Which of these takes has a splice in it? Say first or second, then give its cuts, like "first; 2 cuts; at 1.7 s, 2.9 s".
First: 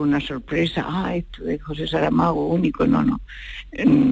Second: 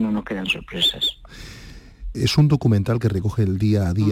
second; 1 cut; at 2.1 s